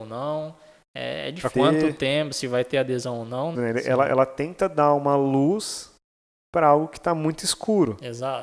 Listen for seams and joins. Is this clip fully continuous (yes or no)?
no